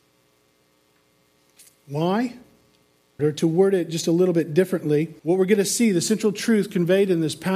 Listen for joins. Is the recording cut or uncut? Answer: cut